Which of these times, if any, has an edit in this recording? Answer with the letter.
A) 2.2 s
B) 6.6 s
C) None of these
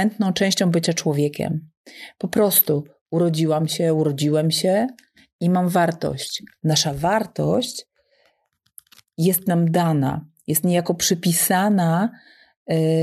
B